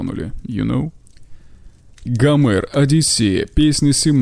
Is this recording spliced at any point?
yes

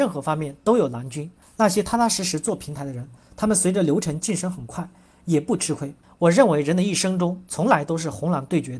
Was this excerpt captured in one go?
no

